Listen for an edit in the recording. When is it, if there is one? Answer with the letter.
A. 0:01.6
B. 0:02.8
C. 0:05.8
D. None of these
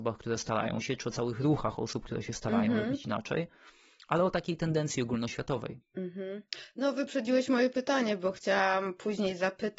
C